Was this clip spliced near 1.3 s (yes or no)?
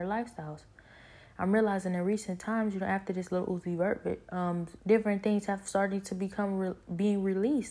no